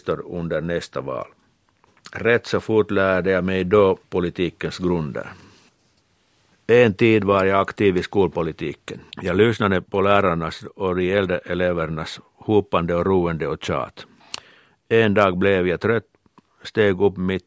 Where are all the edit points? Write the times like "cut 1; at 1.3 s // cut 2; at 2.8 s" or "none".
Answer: cut 1; at 9.1 s